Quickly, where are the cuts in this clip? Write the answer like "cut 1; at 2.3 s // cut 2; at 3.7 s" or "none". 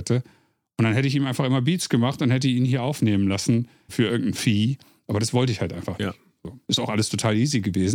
cut 1; at 3.9 s // cut 2; at 6.6 s